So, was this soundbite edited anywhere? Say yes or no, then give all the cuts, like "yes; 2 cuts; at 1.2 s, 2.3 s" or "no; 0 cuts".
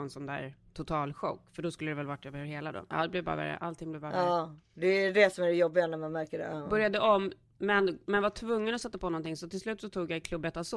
yes; 1 cut; at 2.9 s